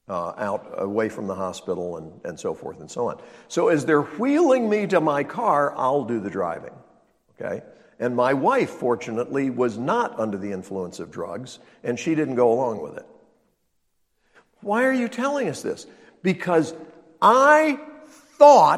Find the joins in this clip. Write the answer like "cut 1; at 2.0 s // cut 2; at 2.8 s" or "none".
cut 1; at 5.7 s